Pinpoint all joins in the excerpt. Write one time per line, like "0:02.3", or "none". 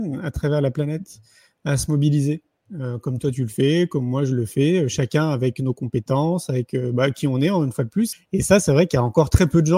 0:08.1